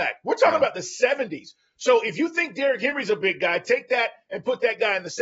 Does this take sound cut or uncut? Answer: uncut